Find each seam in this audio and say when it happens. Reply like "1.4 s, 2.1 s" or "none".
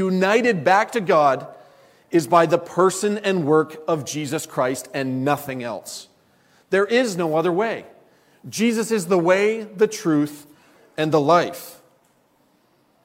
none